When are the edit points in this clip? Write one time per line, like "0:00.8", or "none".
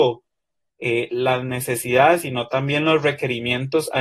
none